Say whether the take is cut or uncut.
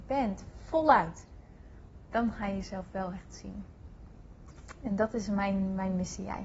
uncut